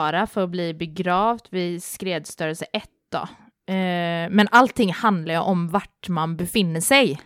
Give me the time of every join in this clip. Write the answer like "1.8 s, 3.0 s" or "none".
none